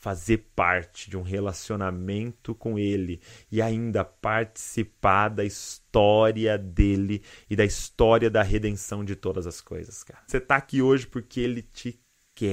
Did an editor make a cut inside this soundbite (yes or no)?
yes